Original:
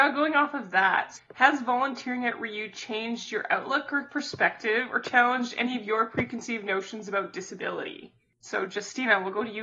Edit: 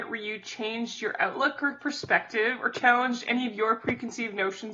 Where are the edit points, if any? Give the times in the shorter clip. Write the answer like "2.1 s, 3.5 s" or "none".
none